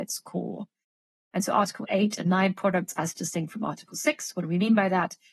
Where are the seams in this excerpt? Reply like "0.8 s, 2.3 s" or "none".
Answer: 1.3 s